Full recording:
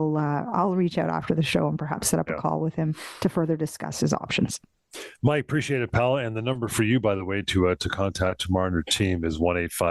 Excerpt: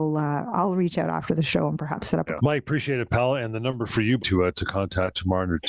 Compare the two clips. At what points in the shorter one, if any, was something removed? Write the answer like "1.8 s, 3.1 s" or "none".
2.4 s, 4.2 s